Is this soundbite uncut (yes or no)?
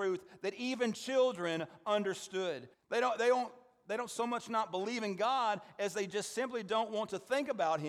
no